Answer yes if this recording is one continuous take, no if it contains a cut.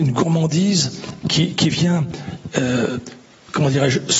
yes